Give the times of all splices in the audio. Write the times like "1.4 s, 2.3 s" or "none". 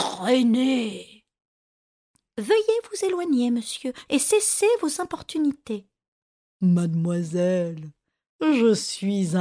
4.1 s

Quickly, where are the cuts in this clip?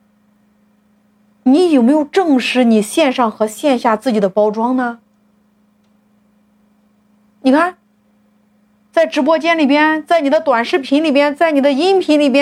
none

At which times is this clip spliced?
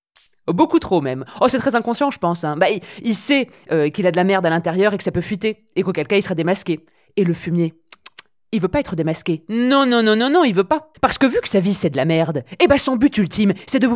none

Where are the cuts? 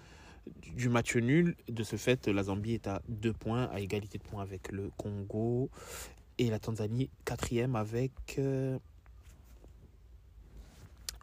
none

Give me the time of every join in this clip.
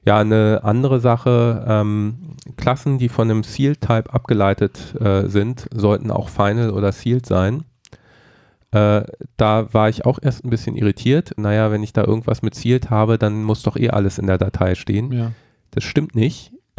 2.5 s, 11.4 s

